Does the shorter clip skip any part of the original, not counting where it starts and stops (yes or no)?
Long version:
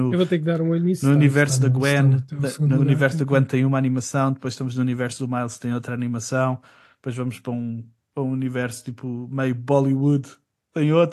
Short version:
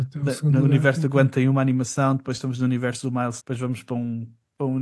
yes